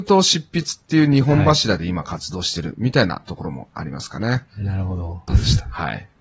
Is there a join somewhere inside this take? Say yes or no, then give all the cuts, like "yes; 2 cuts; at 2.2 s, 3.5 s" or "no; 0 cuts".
yes; 1 cut; at 5.3 s